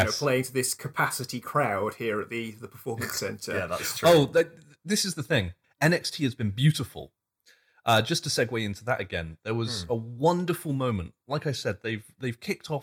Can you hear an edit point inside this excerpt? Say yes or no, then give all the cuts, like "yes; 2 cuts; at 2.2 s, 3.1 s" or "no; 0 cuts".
yes; 1 cut; at 5.6 s